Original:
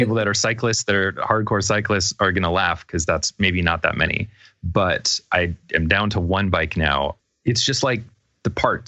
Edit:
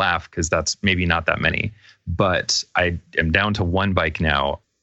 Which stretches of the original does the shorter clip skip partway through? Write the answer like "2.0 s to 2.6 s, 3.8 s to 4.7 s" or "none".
none